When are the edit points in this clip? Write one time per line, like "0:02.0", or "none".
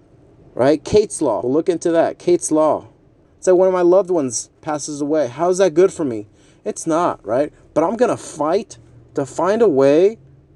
0:01.4
0:03.2